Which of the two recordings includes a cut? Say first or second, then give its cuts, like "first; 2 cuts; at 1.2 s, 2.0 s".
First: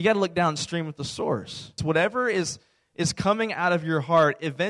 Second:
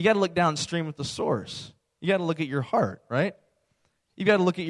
first; 1 cut; at 1.8 s